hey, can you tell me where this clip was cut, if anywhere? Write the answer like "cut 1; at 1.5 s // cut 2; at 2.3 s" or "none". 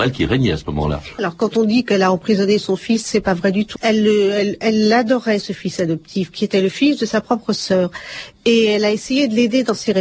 cut 1; at 1.2 s // cut 2; at 3.8 s